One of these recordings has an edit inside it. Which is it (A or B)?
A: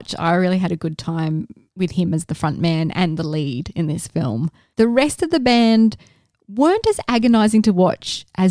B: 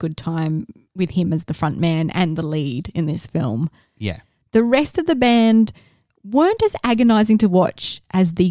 A